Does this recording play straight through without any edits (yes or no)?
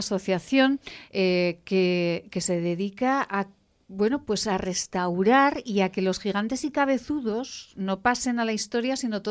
yes